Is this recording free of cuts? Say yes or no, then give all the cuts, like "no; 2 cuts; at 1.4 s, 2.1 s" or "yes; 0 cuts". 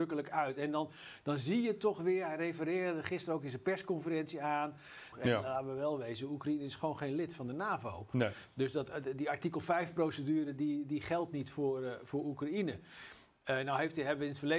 no; 1 cut; at 5.1 s